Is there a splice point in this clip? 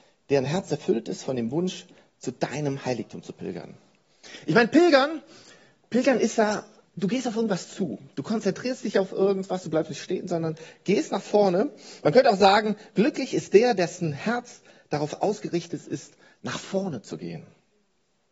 no; 0 cuts

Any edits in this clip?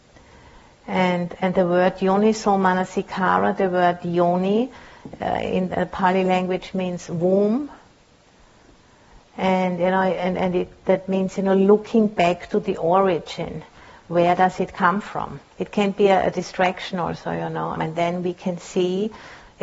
yes; 2 cuts; at 15.5 s, 17.8 s

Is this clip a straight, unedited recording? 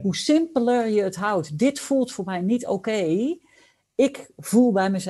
yes; 0 cuts

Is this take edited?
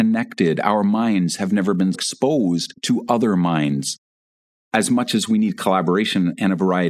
yes; 1 cut; at 1.9 s

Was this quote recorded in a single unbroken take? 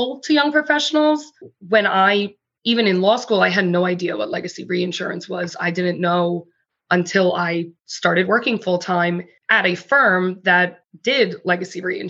yes; 0 cuts

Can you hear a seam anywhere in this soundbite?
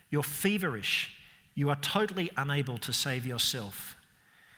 yes; 1 cut; at 1.5 s

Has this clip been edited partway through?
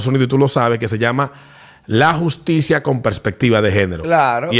no; 0 cuts

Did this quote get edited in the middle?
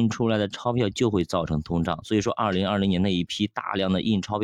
no; 0 cuts

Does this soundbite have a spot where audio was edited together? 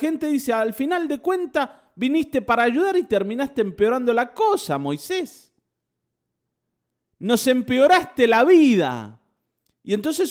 no; 0 cuts

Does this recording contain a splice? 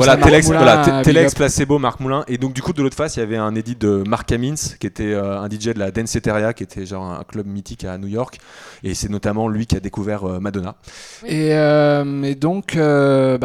yes; 1 cut; at 11.2 s

